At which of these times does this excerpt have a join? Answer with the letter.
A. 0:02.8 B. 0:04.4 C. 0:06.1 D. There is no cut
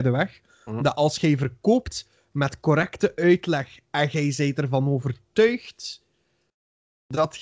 D